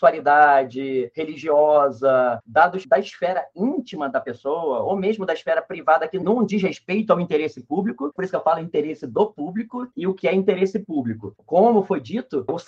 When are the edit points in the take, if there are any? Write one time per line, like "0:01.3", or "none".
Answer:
0:08.2
0:11.4